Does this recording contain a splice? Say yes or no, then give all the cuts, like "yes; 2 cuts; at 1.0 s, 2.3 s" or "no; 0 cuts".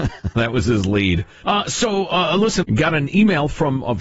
yes; 2 cuts; at 1.4 s, 2.6 s